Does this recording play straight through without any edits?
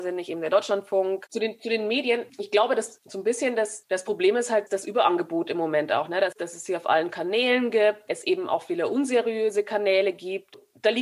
no; 2 cuts; at 6.4 s, 8.1 s

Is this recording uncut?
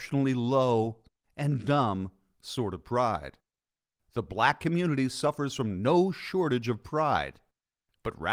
yes; 0 cuts

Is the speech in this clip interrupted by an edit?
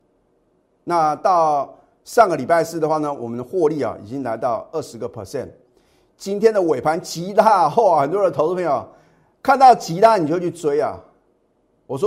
no; 0 cuts

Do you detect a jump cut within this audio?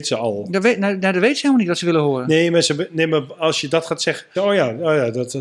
yes; 1 cut; at 4.3 s

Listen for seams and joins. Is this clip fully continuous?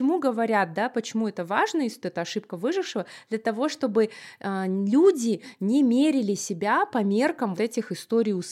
no; 2 cuts; at 2.0 s, 7.6 s

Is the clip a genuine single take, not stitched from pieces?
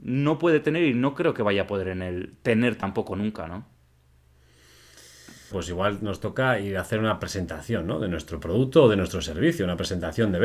no; 1 cut; at 5.5 s

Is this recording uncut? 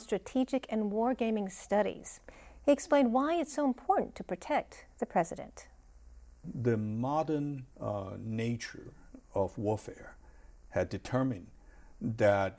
no; 1 cut; at 7.7 s

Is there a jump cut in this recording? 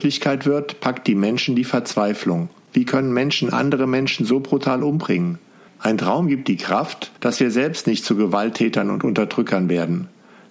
yes; 3 cuts; at 2.7 s, 5.7 s, 7.2 s

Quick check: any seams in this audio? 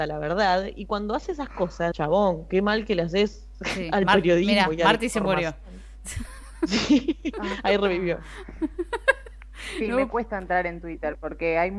yes; 1 cut; at 1.9 s

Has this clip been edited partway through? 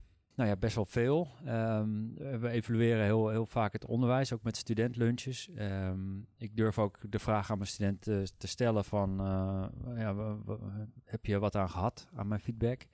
no; 0 cuts

